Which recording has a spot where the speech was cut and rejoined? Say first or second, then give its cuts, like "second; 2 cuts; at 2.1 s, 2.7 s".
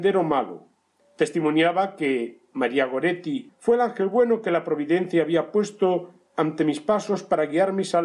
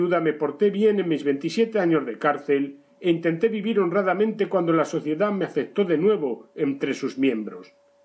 first; 2 cuts; at 1.0 s, 3.5 s